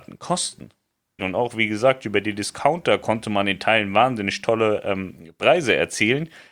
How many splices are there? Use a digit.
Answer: 1